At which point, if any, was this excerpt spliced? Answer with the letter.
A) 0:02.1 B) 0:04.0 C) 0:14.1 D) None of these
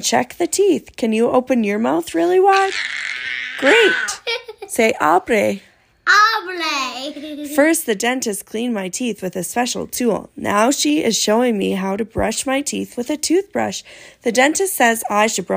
D